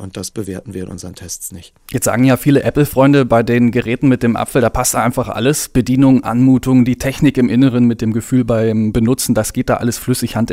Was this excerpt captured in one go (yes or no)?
yes